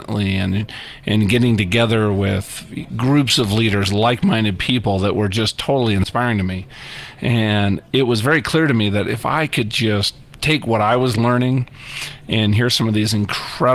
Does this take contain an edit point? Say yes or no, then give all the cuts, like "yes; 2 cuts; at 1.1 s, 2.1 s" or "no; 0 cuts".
no; 0 cuts